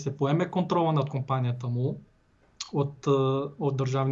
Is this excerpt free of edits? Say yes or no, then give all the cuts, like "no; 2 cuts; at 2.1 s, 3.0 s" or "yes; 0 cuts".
yes; 0 cuts